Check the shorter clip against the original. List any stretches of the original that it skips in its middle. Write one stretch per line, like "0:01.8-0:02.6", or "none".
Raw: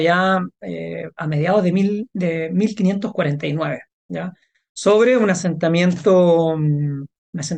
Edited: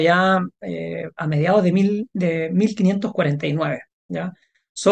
none